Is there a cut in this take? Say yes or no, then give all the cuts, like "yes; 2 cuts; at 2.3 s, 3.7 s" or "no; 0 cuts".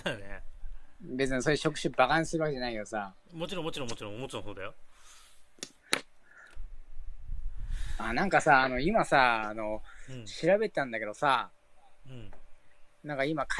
no; 0 cuts